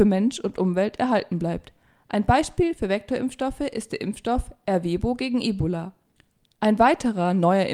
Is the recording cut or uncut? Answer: uncut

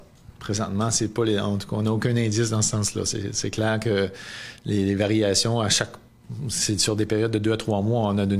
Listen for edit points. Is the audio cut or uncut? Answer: uncut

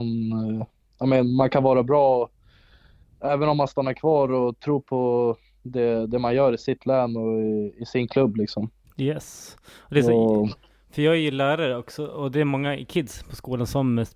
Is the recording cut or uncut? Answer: uncut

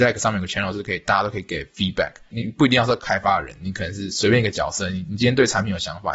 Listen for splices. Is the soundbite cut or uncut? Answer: uncut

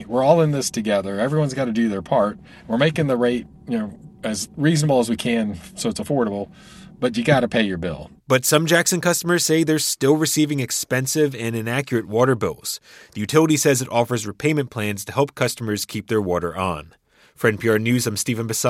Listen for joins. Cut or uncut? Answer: uncut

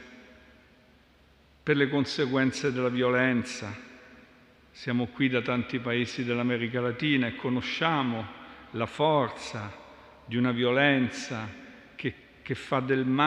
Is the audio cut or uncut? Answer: uncut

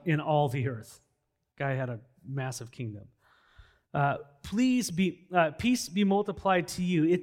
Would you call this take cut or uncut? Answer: uncut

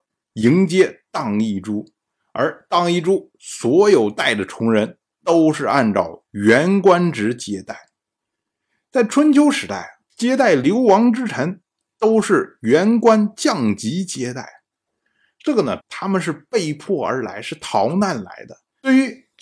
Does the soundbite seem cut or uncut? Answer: cut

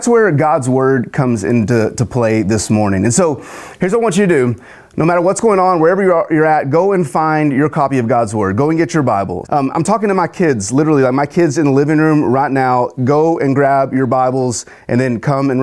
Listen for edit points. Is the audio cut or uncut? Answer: cut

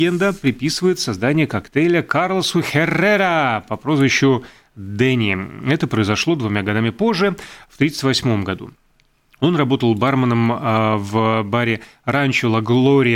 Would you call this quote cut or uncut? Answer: uncut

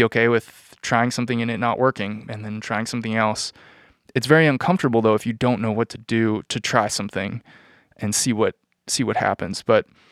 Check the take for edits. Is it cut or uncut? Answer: uncut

